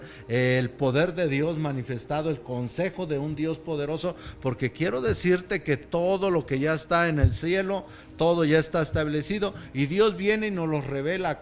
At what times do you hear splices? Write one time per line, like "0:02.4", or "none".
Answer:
none